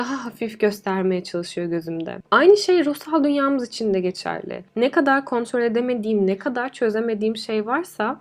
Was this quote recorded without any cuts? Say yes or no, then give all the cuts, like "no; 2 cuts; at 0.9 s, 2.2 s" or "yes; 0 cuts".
no; 1 cut; at 2.2 s